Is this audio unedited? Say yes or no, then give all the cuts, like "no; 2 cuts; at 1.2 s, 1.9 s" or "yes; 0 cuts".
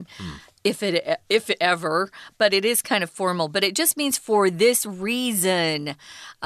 yes; 0 cuts